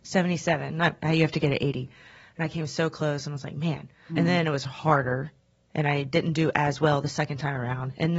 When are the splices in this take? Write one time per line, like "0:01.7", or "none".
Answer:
0:04.1